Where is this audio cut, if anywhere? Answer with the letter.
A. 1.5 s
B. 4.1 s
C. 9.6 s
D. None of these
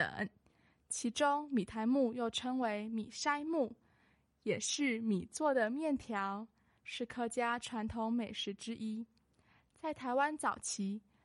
D